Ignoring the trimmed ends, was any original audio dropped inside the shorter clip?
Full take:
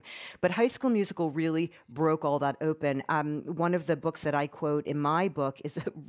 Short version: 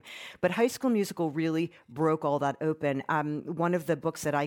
no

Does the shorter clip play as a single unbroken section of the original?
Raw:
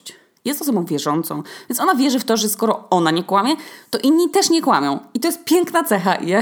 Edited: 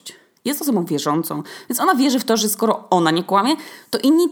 yes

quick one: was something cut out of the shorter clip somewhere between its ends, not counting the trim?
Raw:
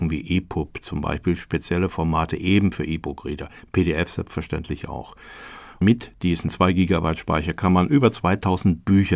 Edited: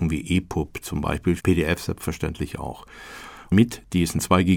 yes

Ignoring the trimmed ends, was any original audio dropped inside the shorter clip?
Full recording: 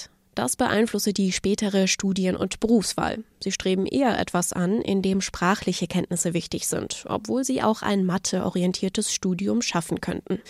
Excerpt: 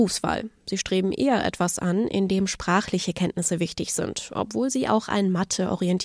no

